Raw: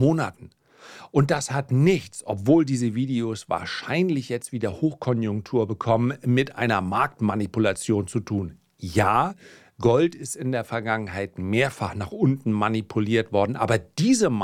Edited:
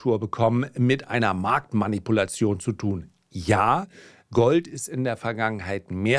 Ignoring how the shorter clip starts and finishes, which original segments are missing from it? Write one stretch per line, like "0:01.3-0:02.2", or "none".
none